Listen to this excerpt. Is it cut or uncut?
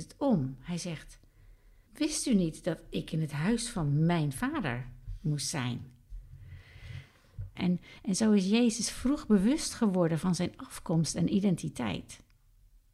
cut